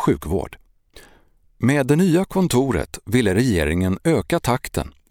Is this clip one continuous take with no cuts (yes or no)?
yes